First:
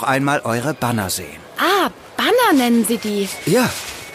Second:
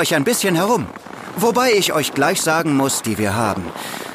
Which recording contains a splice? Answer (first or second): second